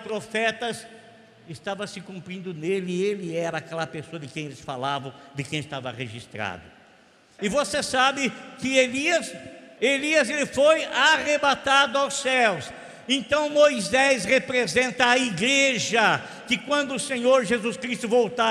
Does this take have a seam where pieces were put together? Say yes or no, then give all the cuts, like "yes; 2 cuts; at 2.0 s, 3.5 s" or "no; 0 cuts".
yes; 2 cuts; at 7.4 s, 9.8 s